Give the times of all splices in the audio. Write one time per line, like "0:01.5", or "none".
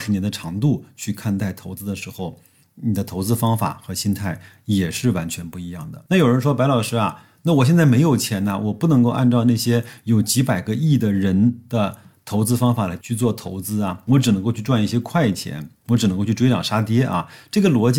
none